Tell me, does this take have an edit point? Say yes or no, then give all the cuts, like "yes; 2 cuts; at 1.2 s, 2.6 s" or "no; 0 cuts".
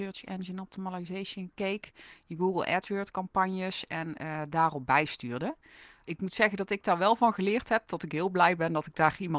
no; 0 cuts